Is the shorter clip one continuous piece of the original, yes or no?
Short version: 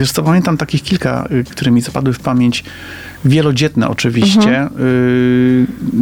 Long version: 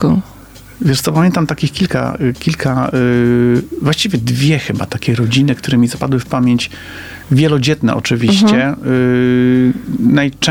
no